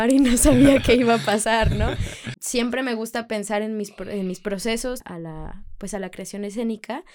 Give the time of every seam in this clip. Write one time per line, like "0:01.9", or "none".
0:02.3
0:05.0